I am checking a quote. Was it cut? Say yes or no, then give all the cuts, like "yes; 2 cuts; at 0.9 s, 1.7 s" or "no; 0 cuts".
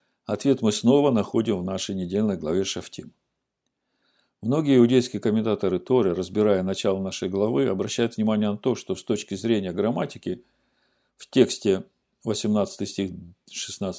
no; 0 cuts